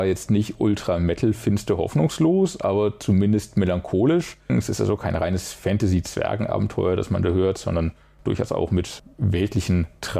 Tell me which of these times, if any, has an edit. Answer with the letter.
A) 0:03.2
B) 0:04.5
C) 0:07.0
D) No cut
B